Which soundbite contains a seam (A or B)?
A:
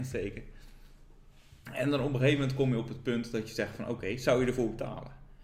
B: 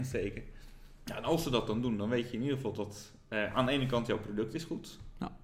B